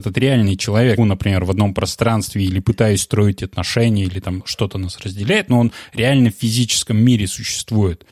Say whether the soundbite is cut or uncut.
cut